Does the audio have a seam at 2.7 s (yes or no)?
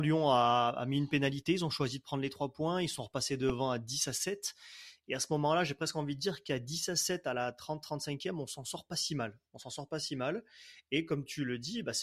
no